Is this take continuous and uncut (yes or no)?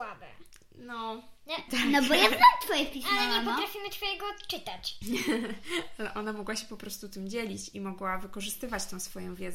no